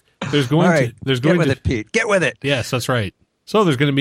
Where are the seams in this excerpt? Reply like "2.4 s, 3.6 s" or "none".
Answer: none